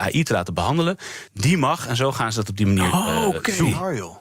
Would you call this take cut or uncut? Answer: cut